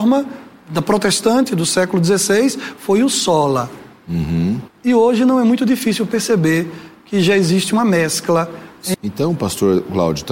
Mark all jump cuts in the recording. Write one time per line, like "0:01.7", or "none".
0:04.7
0:08.9